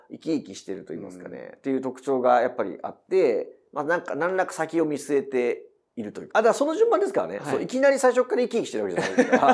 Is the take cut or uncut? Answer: cut